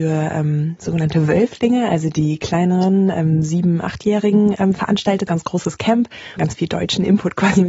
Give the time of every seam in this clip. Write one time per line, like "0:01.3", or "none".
0:05.3
0:06.4